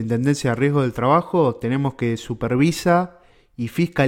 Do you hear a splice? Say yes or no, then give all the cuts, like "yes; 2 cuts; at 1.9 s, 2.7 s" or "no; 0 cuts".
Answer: no; 0 cuts